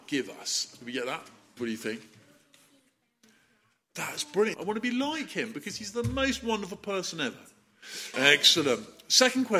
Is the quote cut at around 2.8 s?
no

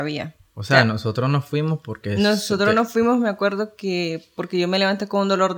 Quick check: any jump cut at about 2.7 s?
no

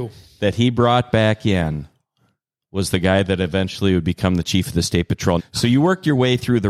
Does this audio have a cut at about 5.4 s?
yes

